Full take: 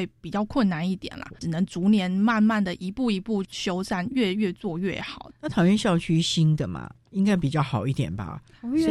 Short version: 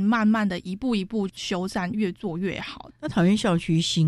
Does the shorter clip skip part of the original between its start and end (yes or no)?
yes